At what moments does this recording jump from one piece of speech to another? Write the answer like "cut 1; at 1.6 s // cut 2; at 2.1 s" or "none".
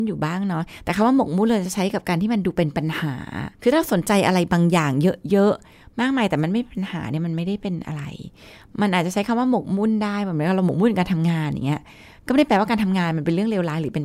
cut 1; at 3.5 s